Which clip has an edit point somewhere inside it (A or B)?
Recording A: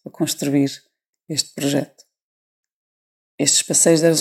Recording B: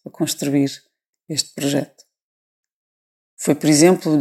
B